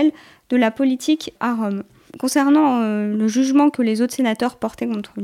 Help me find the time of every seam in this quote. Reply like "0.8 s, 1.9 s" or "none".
none